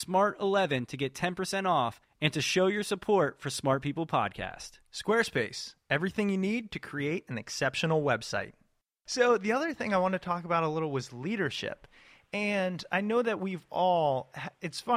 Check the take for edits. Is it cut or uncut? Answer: uncut